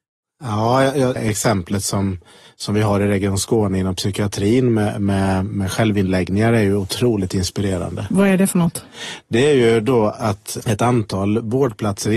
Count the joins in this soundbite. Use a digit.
1